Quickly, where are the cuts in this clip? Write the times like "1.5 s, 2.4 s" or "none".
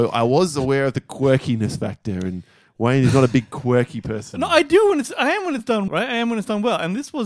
5.9 s